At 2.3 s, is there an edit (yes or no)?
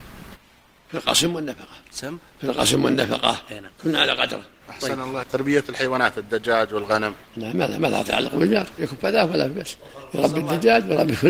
no